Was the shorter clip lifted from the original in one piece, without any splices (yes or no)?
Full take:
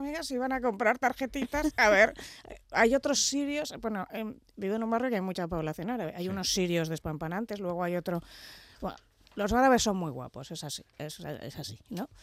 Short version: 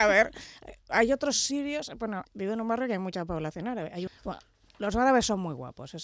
no